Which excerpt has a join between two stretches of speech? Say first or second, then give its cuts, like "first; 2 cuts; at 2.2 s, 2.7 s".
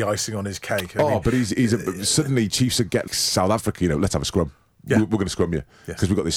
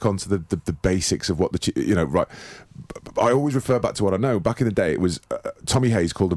first; 1 cut; at 3.1 s